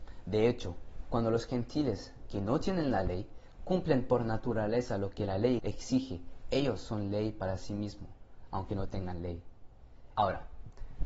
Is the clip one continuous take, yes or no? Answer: no